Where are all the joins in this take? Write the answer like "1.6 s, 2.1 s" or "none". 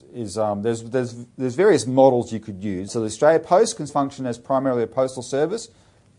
2.9 s, 3.9 s

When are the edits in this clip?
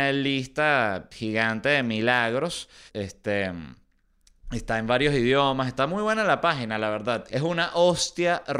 2.9 s, 7.3 s

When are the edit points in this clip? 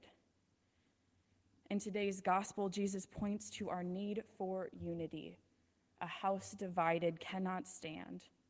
none

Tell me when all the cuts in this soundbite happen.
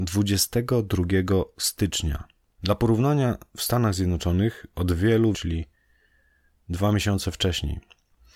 2.5 s, 5.3 s

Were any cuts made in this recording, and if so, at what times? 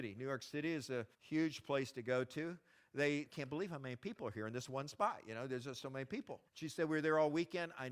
1.1 s, 3.3 s, 6.5 s

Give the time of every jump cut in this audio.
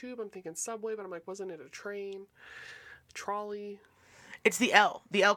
none

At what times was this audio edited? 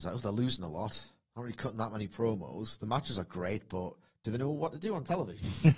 none

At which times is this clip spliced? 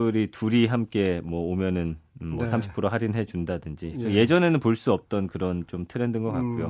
none

